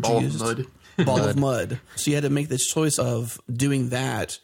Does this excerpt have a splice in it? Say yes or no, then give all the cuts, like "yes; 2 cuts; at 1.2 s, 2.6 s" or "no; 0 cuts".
yes; 2 cuts; at 2.0 s, 3.0 s